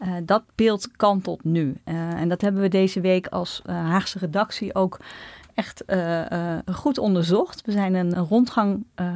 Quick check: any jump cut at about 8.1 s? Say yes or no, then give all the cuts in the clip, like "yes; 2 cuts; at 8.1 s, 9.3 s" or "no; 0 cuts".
yes; 1 cut; at 8.1 s